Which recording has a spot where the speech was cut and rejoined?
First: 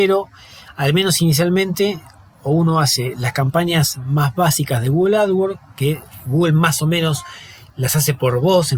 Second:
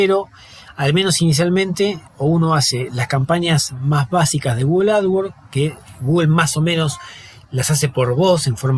second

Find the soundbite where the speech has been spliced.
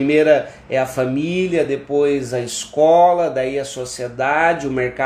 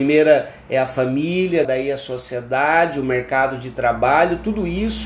second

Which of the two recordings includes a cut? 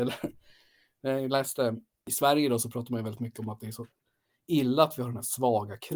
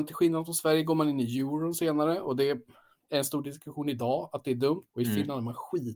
second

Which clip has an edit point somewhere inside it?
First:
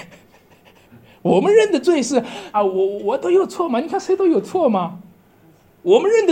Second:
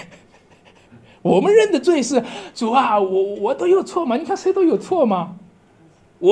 first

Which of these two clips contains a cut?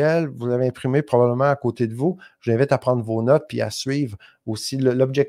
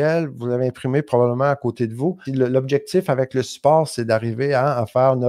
second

